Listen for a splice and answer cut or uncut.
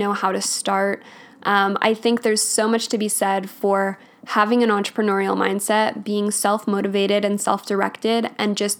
uncut